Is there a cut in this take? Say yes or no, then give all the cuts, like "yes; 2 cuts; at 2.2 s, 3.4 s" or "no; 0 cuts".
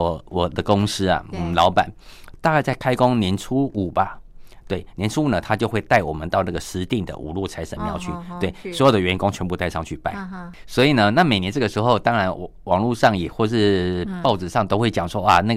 no; 0 cuts